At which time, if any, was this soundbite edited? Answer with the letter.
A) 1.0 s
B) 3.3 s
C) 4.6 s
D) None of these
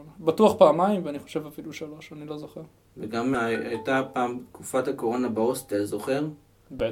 B